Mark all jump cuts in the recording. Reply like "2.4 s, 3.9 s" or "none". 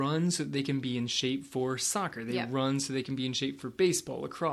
none